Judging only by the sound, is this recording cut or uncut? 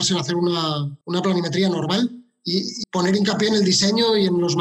cut